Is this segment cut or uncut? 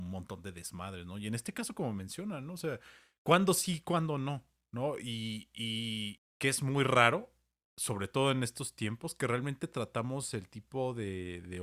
cut